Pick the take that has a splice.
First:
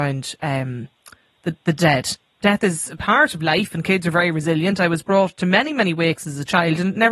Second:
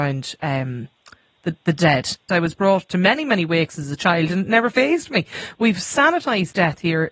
second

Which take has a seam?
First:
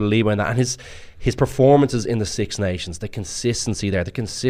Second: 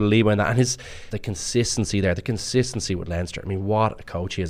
second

